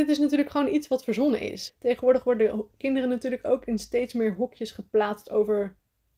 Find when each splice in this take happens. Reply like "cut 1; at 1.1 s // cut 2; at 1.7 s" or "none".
cut 1; at 1.7 s